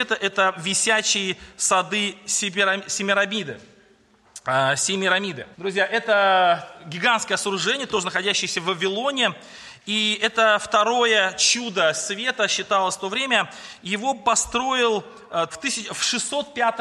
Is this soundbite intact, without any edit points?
no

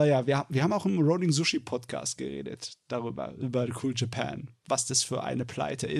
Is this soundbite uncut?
yes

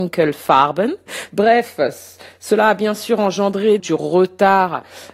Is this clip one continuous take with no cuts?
no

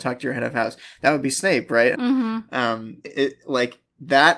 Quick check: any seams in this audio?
yes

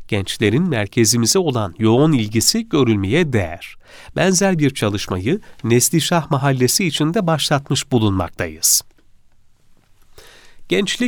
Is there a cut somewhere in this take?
no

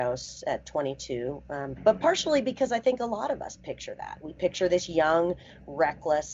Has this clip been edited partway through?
yes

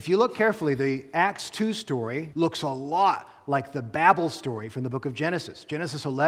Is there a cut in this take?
yes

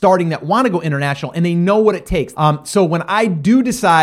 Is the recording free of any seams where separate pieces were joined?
no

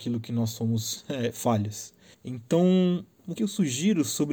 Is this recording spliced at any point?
yes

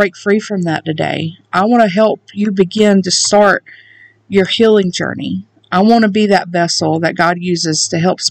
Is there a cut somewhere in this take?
no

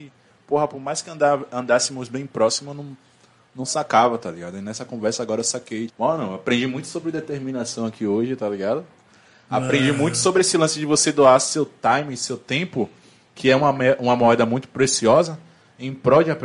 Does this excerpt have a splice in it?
yes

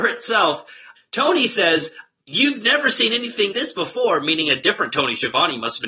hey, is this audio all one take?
no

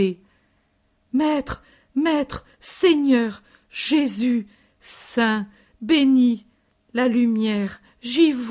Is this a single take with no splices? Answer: yes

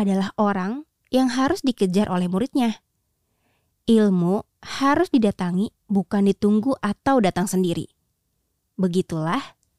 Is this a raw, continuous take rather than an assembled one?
yes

